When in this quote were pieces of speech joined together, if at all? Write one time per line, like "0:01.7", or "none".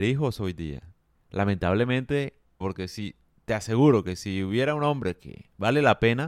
0:01.1
0:02.6